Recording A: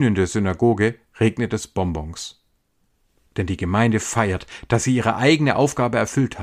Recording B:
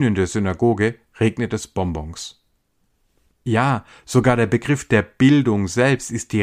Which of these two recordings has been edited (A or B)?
B